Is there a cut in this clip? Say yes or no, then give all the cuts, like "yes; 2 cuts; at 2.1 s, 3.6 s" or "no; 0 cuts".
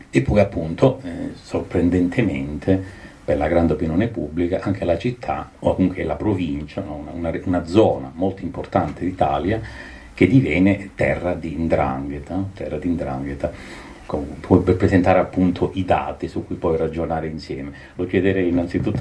yes; 1 cut; at 14.1 s